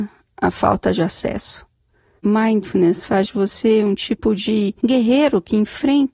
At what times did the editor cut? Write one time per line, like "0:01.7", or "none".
0:02.2
0:04.8